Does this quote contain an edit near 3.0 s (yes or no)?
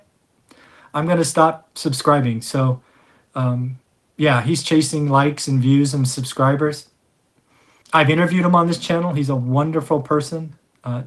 no